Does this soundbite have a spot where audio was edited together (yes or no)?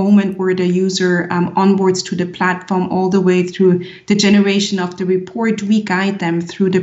no